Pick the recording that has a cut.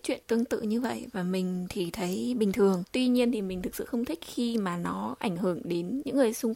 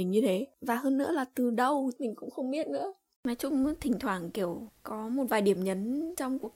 second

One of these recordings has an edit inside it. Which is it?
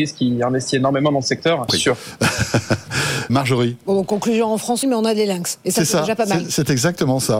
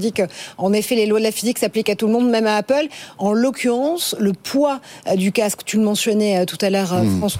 first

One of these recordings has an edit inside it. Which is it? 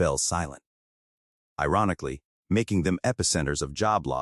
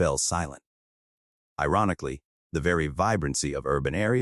first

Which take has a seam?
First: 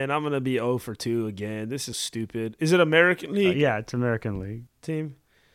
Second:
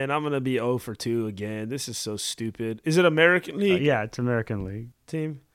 first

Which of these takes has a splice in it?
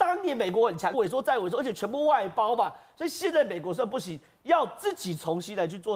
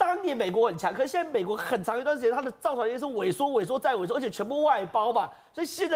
first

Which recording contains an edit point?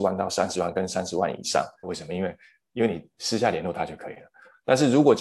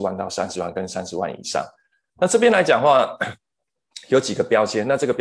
first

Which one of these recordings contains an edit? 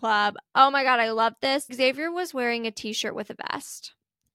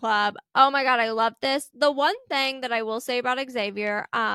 first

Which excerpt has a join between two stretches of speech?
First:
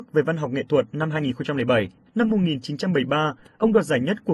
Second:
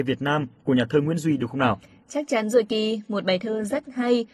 first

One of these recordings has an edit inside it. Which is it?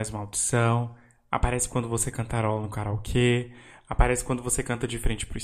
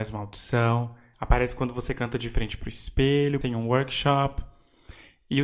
second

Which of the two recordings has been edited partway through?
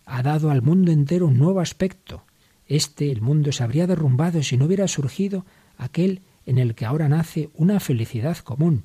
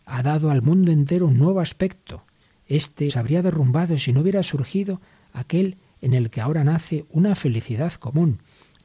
second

